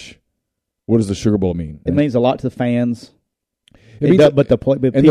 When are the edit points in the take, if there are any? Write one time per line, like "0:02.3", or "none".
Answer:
0:01.9